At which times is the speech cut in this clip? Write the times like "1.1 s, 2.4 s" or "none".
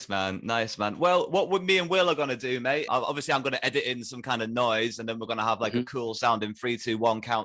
2.9 s